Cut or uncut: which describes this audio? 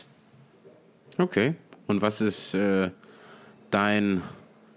uncut